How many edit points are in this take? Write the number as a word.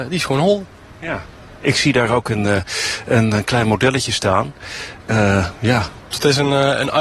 one